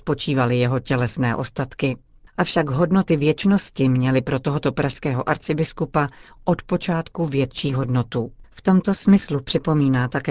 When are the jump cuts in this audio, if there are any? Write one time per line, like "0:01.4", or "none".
0:02.3
0:08.4